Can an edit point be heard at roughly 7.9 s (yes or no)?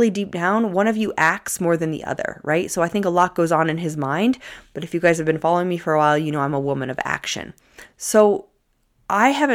yes